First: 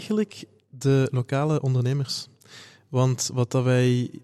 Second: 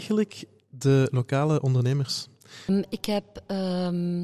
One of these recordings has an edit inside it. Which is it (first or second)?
second